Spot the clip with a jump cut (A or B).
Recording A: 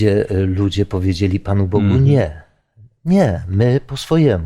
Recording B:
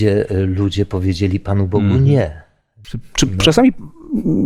B